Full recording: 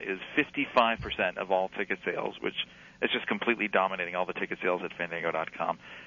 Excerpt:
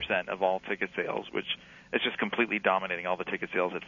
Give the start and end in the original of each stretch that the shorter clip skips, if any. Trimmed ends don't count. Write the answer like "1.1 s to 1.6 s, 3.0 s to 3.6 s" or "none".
none